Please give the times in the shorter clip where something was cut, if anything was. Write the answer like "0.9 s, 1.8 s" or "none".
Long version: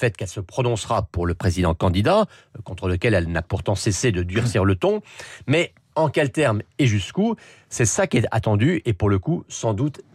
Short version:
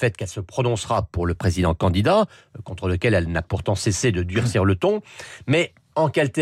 none